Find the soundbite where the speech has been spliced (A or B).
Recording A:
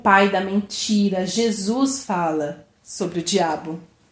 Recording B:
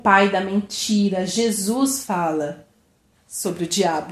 A